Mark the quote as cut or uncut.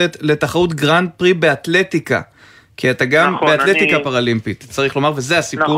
uncut